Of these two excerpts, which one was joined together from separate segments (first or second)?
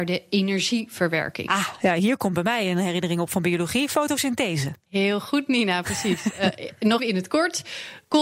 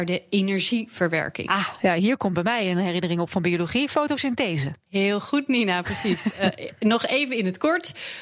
first